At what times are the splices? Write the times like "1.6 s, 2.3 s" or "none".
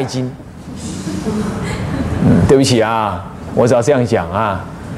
none